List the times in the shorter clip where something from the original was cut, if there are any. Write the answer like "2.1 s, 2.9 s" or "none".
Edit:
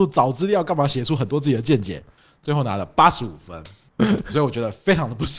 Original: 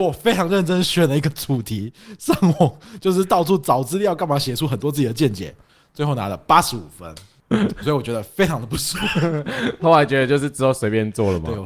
none